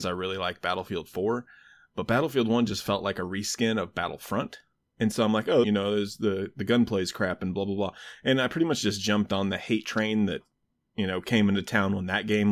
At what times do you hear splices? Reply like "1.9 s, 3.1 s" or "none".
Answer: 5.6 s